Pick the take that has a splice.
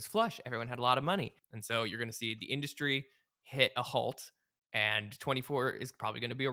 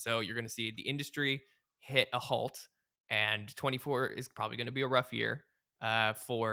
first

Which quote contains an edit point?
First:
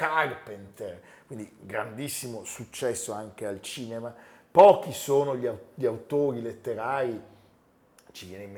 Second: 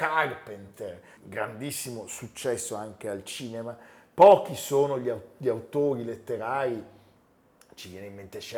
second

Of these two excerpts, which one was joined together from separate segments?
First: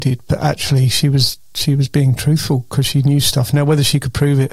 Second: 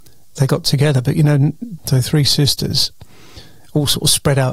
second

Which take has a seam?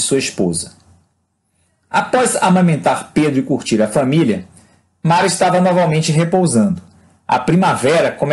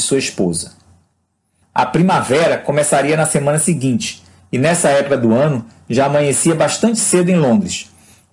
second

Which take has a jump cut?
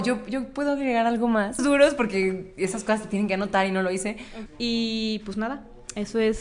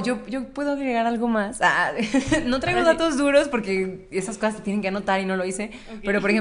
first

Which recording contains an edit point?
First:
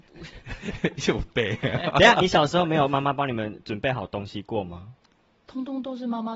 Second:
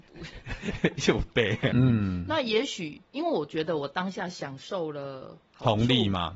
second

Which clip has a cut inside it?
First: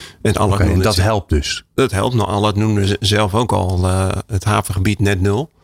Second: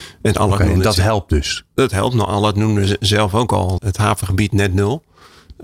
second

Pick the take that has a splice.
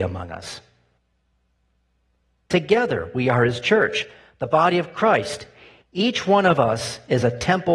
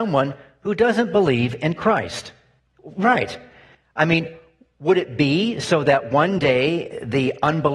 second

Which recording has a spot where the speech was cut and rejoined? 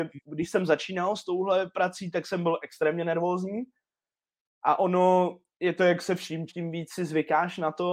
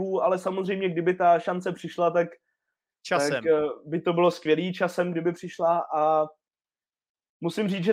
first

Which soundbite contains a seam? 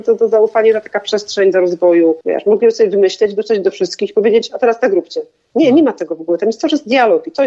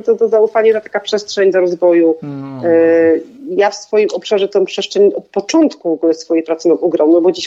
first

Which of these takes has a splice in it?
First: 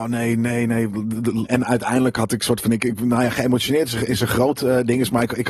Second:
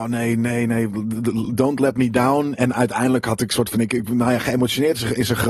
first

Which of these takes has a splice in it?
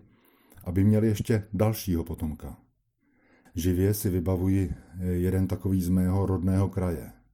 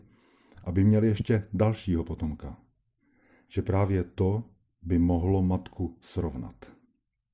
first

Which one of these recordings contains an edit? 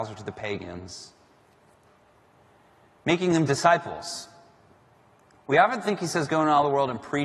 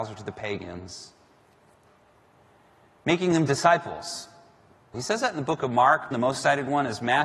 second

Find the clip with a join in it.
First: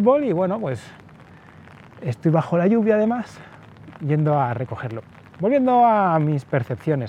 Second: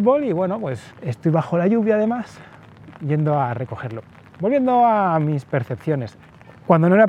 second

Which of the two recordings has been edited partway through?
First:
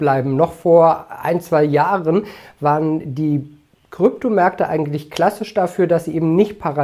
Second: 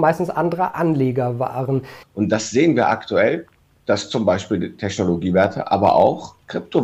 second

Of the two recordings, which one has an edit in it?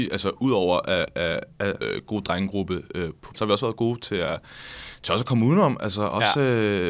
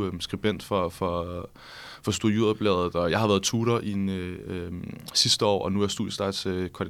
first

